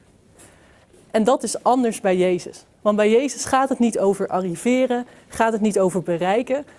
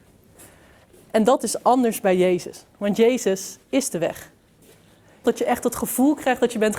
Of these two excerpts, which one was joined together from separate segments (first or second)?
second